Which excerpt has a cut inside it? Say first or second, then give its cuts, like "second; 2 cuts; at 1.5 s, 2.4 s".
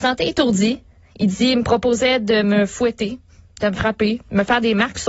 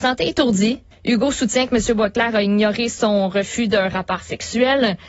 second; 1 cut; at 0.9 s